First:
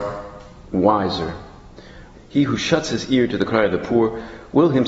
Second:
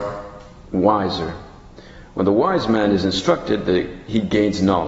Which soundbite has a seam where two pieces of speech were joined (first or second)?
first